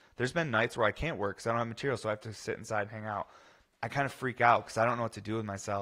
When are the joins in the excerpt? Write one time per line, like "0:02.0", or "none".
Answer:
none